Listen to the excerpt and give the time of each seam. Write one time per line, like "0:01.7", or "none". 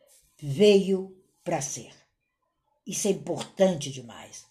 none